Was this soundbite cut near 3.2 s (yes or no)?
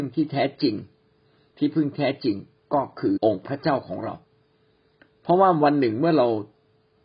yes